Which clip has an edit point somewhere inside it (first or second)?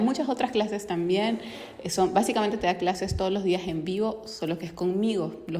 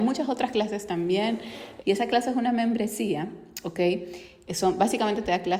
second